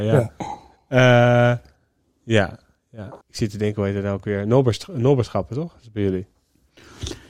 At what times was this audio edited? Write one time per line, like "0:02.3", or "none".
0:03.2